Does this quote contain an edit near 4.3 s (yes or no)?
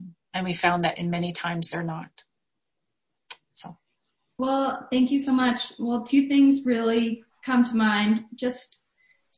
yes